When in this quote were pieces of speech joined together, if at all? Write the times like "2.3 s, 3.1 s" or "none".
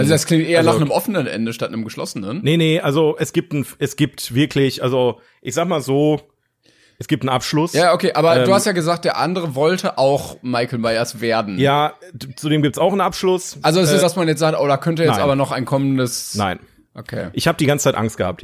14.0 s